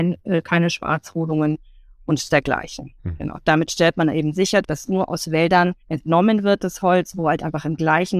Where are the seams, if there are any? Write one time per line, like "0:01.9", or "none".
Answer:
0:04.6
0:05.8